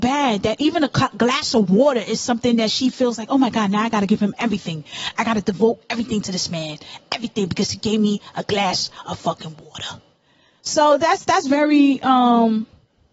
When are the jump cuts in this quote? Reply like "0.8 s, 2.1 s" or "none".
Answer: none